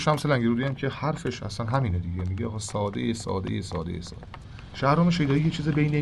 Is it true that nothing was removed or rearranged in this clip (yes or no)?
yes